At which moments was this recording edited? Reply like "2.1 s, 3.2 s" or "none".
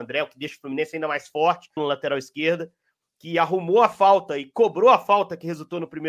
1.8 s